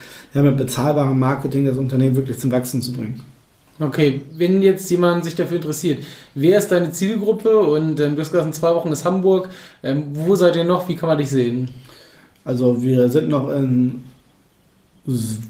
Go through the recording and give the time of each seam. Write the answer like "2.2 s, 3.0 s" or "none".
none